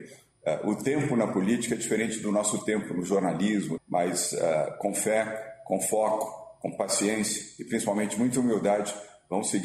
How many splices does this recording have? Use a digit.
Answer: 1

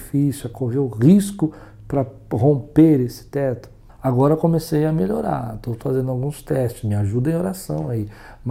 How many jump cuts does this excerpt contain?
1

